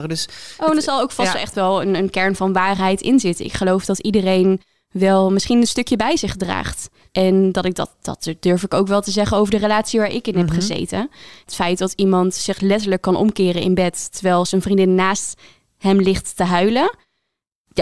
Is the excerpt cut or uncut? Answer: uncut